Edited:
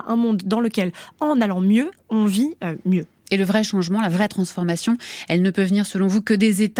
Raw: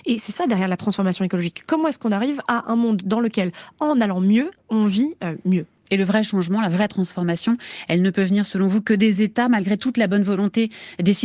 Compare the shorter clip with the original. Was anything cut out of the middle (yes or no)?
no